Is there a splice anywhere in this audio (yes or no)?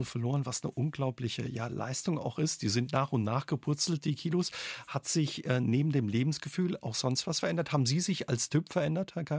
no